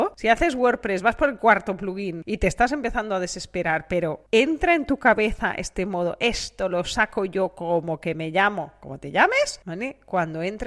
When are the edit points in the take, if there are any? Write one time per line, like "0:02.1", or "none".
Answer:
0:09.6

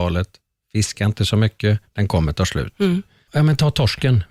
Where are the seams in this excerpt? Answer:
0:03.3

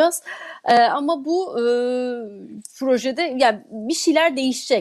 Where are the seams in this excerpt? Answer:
none

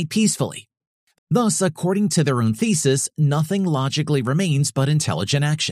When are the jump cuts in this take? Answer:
0:01.1

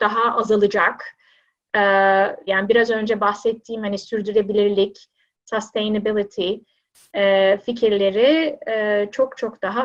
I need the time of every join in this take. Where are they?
0:02.5

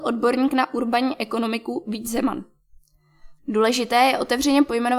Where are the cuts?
0:03.4

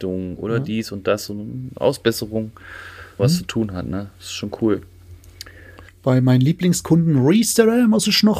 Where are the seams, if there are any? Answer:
0:03.2
0:05.9

